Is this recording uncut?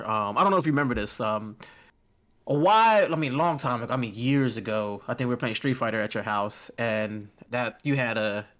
yes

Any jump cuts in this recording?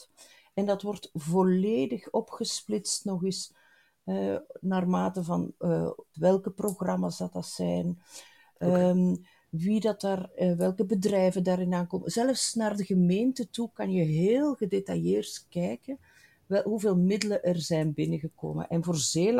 yes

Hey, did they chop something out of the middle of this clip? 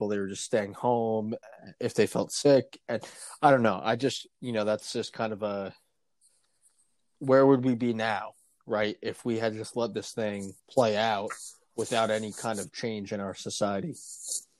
yes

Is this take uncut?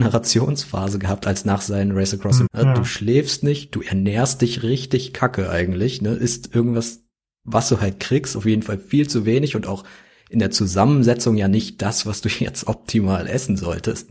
no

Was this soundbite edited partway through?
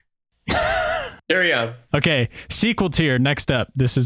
yes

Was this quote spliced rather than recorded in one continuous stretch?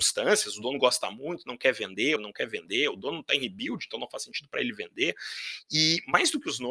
yes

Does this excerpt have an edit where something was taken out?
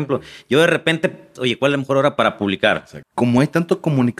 yes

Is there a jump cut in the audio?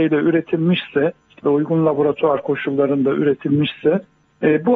yes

